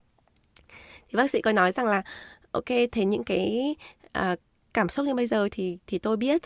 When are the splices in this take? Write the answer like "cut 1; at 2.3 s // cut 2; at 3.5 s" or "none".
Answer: none

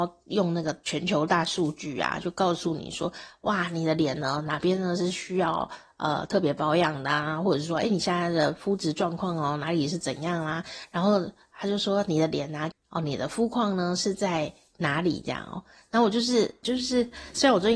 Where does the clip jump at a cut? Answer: cut 1; at 12.7 s // cut 2; at 16.6 s

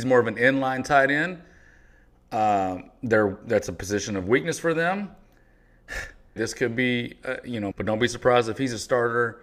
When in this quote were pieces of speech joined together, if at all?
cut 1; at 6.4 s // cut 2; at 7.7 s

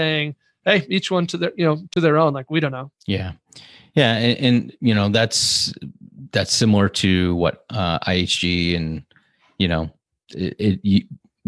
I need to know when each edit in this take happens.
cut 1; at 2.9 s // cut 2; at 10.6 s

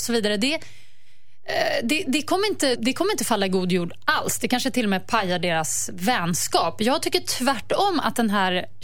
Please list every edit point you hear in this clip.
cut 1; at 2.8 s

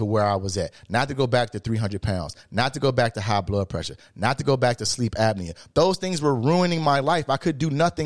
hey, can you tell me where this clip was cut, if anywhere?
none

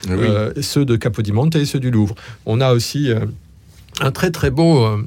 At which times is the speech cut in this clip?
none

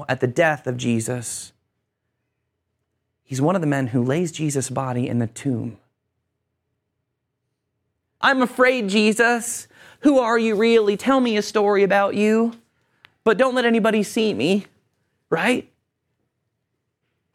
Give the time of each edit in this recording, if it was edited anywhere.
cut 1; at 8.2 s

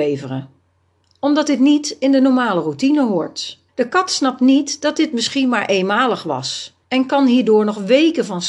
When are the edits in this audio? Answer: cut 1; at 3.7 s // cut 2; at 6.8 s

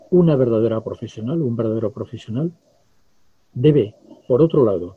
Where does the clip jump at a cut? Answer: none

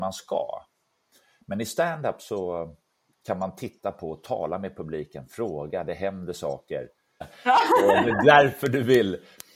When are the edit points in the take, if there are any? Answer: cut 1; at 7.2 s

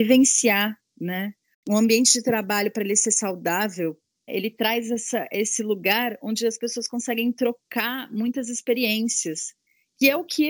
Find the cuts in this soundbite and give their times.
cut 1; at 1.5 s

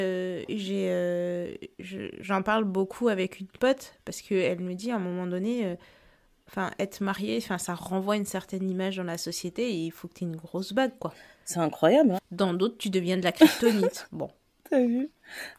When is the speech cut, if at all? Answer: cut 1; at 12.2 s

